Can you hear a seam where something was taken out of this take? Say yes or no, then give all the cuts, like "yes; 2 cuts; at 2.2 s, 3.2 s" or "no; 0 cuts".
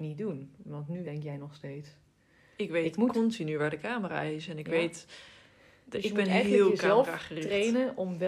yes; 1 cut; at 1.0 s